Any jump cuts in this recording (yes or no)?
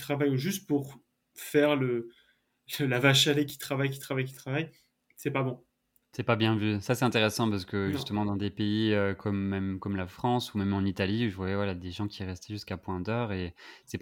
no